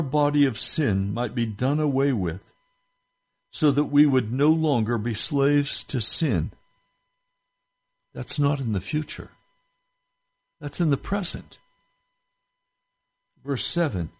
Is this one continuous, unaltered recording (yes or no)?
yes